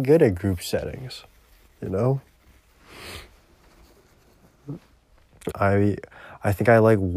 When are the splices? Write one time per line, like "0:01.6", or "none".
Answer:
0:05.5